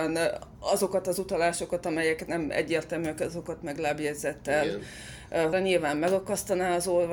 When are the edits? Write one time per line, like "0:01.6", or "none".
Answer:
0:05.5